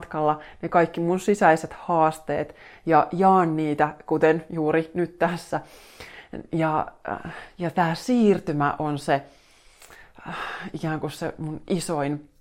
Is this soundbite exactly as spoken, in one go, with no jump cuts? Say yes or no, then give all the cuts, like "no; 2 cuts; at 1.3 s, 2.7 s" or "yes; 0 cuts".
yes; 0 cuts